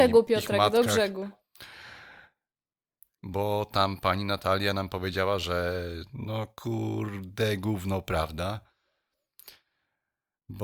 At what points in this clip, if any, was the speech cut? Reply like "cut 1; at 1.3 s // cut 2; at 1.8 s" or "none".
cut 1; at 3.2 s